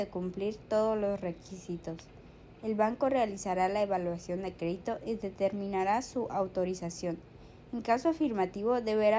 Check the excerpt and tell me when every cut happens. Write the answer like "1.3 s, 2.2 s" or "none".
none